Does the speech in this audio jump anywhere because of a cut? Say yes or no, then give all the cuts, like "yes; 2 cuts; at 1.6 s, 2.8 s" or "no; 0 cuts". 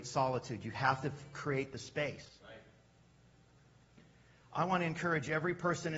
no; 0 cuts